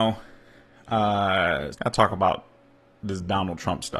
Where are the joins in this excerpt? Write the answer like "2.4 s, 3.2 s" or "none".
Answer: 1.7 s